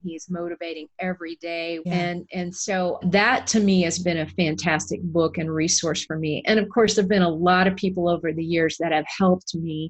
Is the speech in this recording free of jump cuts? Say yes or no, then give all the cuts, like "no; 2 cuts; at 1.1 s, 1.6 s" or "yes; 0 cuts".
no; 2 cuts; at 1.8 s, 3.0 s